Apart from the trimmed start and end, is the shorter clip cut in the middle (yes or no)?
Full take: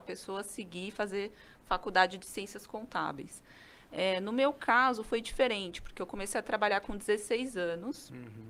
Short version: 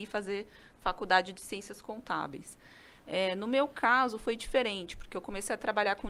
no